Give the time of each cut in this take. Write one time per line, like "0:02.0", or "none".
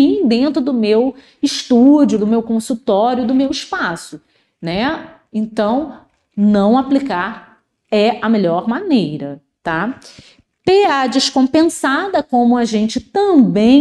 none